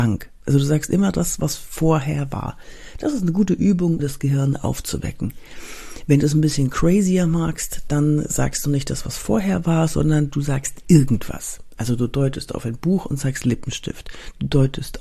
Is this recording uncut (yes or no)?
no